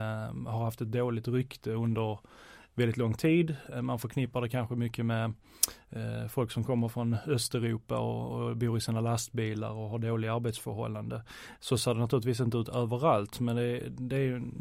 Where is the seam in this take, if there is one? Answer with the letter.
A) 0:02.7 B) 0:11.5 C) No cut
C